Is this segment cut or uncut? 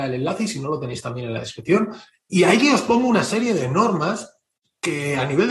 uncut